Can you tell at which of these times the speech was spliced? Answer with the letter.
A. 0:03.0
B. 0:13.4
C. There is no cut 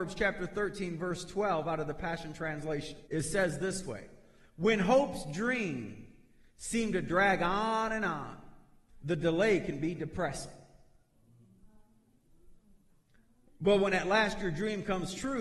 A